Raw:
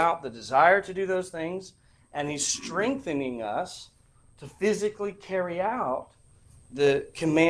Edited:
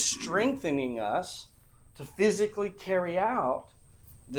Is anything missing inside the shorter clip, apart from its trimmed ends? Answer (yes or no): no